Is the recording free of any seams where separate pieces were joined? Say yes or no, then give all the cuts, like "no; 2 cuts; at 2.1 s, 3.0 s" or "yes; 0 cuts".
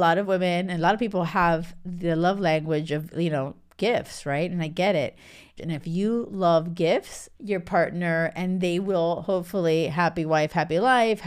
no; 2 cuts; at 5.6 s, 7.3 s